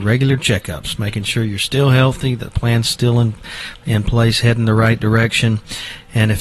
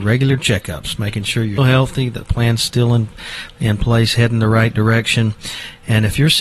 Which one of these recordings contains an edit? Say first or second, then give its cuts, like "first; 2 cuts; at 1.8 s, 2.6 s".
second; 1 cut; at 1.6 s